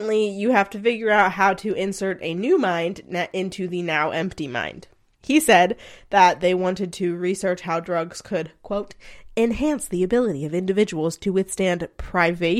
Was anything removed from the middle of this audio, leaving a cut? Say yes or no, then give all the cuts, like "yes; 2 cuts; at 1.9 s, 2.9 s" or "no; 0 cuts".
no; 0 cuts